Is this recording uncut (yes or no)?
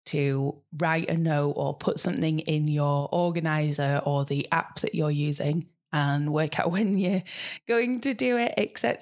yes